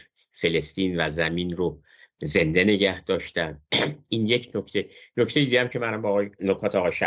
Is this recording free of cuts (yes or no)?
yes